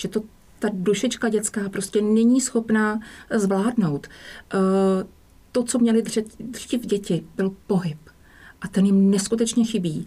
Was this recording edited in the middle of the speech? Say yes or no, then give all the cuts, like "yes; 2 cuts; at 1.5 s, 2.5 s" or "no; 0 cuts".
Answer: no; 0 cuts